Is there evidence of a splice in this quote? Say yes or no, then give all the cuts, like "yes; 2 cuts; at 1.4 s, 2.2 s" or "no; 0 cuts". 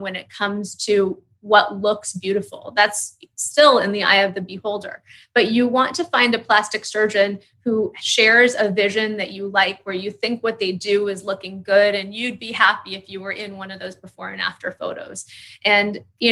no; 0 cuts